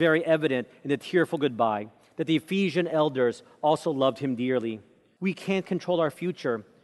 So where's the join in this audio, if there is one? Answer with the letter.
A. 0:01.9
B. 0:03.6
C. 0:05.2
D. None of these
C